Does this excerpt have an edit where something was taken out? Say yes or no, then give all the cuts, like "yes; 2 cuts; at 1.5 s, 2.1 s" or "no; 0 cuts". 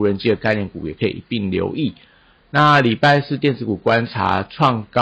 no; 0 cuts